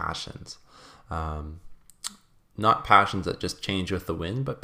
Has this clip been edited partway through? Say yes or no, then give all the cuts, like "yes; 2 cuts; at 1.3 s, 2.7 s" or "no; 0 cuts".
no; 0 cuts